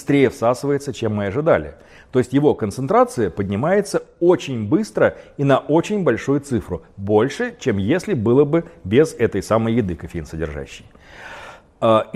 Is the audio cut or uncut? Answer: uncut